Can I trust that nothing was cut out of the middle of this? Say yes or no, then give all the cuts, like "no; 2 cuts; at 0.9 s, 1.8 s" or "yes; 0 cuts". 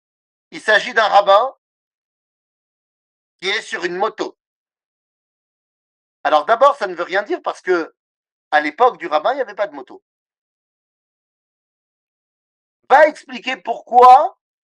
yes; 0 cuts